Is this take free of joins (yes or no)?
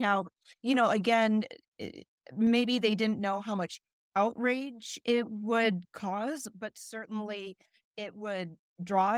yes